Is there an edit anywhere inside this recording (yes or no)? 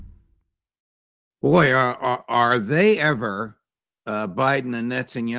no